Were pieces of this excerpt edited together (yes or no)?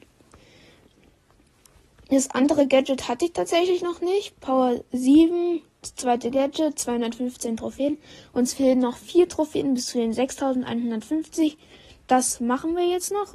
no